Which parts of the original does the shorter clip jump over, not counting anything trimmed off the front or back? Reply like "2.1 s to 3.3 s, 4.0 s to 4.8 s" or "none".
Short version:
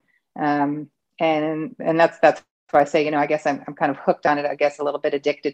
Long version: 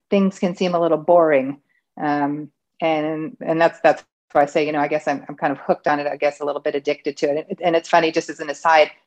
none